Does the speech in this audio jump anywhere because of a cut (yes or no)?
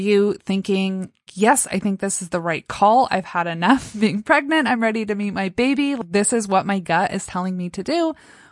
yes